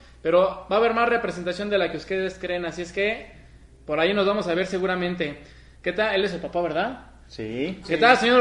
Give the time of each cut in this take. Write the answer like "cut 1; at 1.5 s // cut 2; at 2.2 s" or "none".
cut 1; at 5.7 s

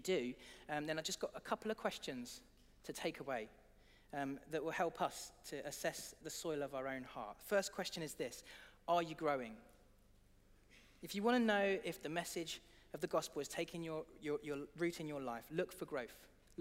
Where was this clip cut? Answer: cut 1; at 6.2 s

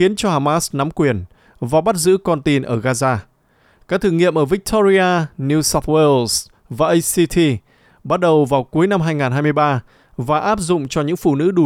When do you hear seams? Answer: cut 1; at 3.8 s

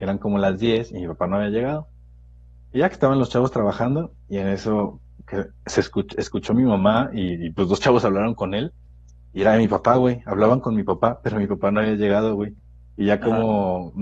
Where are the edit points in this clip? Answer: none

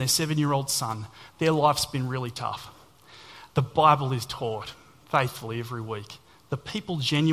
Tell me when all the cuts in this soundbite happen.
cut 1; at 3.5 s

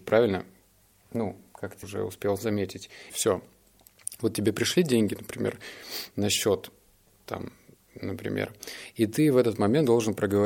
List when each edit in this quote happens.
cut 1; at 1.8 s // cut 2; at 3.1 s

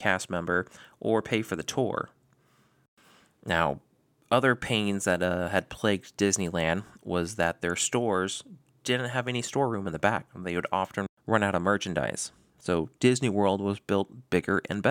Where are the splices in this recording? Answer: none

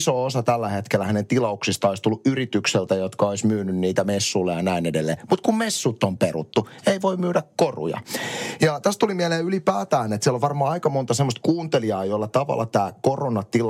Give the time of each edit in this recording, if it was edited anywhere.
none

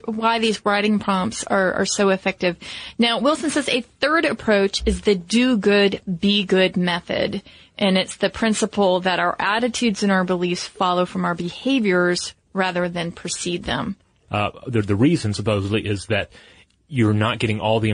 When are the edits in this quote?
cut 1; at 14.3 s

